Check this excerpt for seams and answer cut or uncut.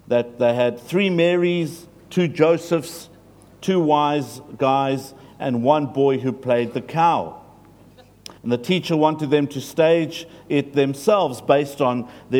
cut